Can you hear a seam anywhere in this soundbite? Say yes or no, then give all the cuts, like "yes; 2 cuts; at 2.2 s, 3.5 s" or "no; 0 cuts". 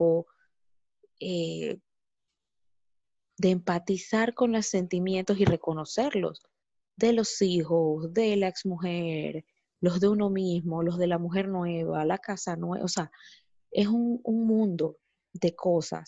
no; 0 cuts